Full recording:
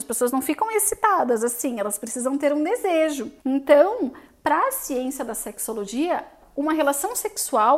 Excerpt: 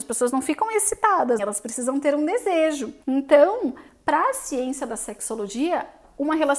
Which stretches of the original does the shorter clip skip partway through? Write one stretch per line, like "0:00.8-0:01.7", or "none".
0:01.4-0:01.8